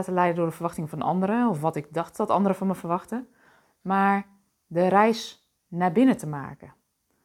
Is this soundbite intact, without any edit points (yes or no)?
yes